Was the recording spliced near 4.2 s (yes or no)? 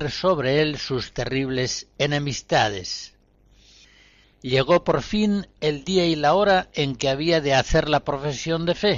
yes